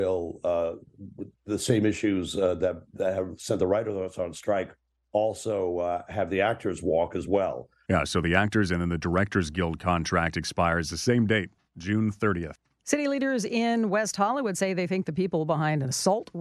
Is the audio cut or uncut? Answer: cut